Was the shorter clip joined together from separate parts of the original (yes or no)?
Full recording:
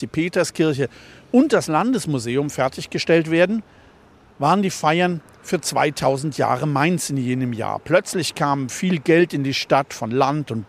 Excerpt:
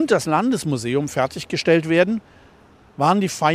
no